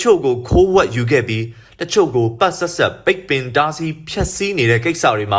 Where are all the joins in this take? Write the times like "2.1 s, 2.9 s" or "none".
2.4 s